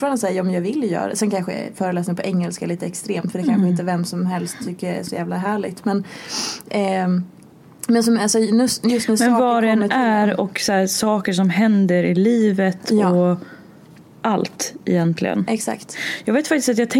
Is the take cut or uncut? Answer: uncut